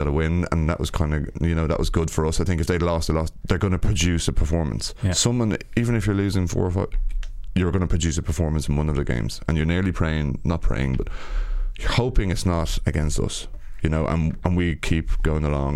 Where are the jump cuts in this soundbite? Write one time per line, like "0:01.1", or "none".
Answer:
none